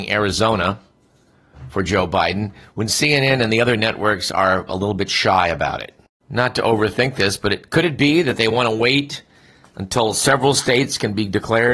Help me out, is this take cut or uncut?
uncut